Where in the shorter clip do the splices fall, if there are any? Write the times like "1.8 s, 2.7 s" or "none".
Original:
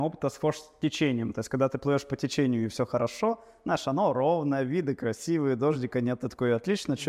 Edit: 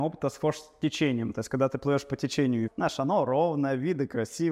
2.7 s